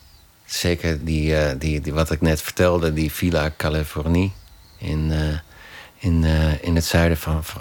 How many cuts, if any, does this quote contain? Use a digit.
1